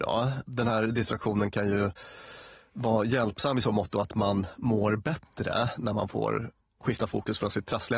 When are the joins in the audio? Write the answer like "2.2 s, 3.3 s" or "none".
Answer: none

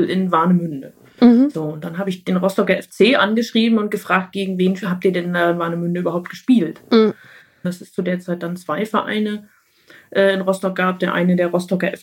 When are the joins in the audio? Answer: 7.6 s

